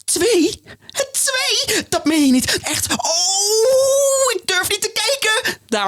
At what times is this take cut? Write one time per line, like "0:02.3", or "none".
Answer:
0:02.6